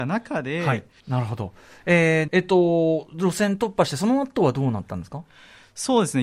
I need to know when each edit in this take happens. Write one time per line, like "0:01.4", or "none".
0:01.0
0:02.3